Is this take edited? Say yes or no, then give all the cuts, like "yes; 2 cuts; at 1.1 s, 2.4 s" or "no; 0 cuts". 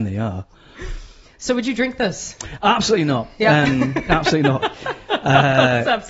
no; 0 cuts